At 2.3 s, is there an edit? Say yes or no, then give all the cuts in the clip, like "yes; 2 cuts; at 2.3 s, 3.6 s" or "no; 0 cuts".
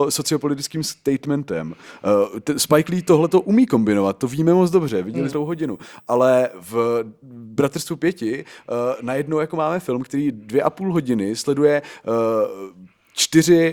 no; 1 cut; at 5.3 s